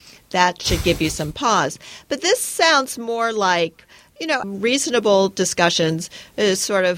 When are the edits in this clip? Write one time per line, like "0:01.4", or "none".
0:04.4